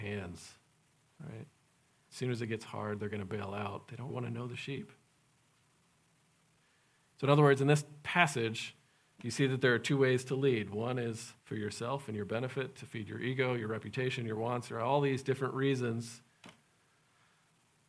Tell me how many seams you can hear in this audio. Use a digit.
2